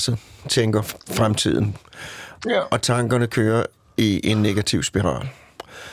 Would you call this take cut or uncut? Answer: uncut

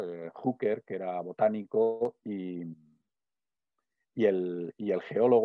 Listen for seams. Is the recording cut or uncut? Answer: uncut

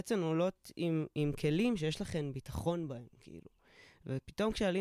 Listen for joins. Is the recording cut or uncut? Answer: uncut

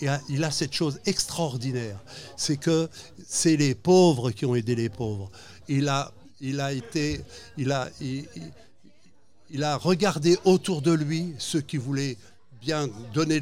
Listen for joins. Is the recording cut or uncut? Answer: cut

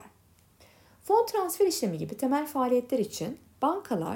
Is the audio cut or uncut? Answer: uncut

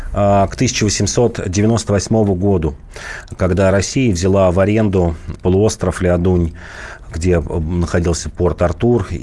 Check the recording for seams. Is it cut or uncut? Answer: cut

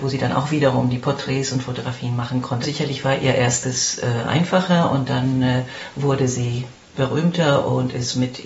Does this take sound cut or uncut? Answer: cut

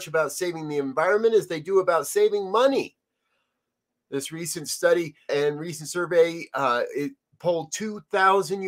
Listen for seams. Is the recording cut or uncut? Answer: cut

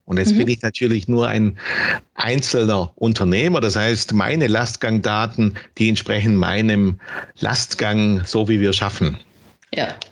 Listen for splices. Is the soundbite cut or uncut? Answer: uncut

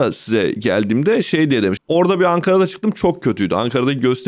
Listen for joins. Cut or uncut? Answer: cut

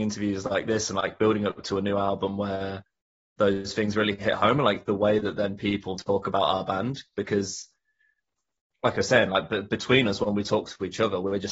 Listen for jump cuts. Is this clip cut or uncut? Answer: cut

